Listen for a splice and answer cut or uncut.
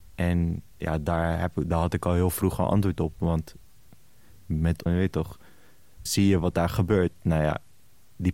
cut